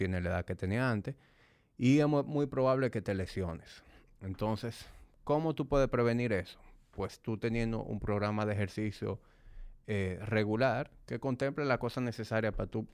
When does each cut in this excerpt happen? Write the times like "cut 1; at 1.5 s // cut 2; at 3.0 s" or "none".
none